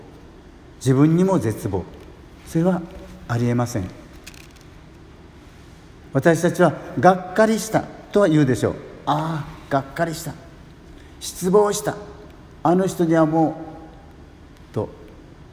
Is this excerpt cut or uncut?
uncut